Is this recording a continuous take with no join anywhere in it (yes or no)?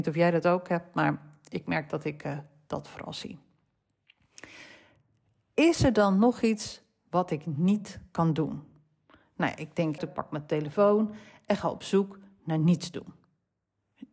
no